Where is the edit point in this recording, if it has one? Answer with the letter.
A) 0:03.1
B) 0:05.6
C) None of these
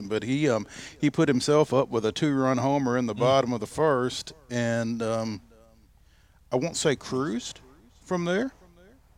C